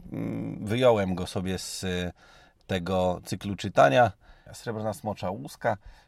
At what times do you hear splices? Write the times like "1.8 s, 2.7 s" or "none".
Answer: 4.5 s